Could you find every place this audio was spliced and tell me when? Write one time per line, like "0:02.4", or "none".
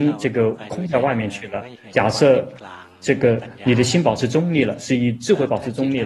0:01.9